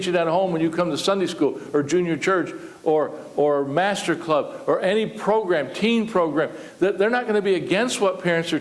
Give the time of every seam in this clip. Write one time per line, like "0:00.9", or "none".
none